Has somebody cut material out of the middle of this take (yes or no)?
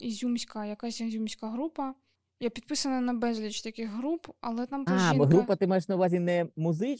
yes